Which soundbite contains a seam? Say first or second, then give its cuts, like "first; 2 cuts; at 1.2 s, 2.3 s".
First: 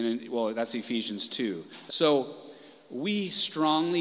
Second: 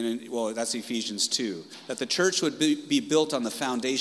first; 1 cut; at 1.9 s